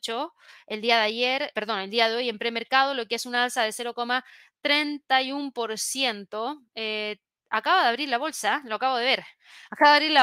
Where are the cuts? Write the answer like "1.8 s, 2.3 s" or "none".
1.5 s